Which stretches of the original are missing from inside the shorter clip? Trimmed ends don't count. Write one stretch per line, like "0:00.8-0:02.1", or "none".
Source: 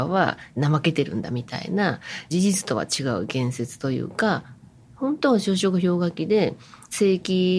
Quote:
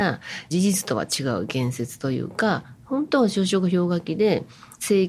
0:04.6-0:04.9